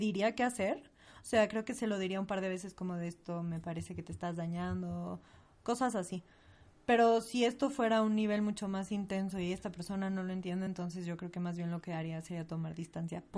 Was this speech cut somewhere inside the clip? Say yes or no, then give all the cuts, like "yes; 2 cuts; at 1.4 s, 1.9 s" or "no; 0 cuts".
no; 0 cuts